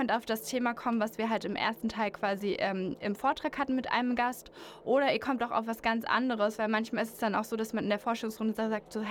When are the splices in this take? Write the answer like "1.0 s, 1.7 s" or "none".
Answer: none

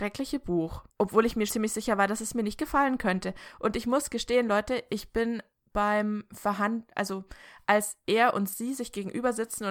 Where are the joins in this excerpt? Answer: 1.5 s

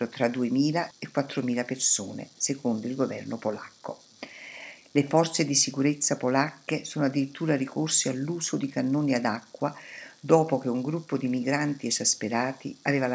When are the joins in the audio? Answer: 0.9 s, 4.8 s

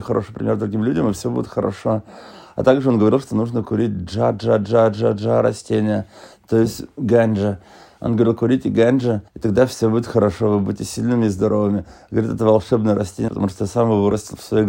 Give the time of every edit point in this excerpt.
9.3 s, 13.3 s

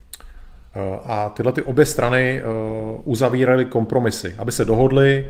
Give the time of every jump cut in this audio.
1.0 s

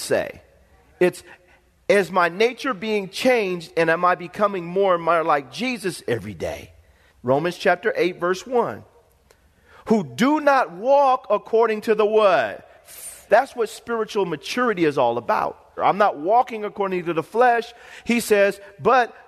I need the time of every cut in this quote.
7.1 s, 13.3 s, 15.8 s

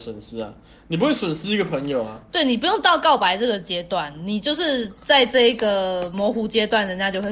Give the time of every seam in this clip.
none

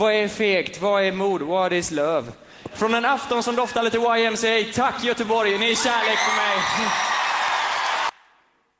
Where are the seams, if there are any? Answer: 2.7 s

